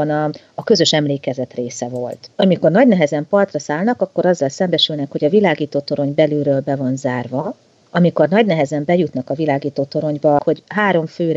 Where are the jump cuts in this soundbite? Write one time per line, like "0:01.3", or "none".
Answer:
0:02.3
0:10.4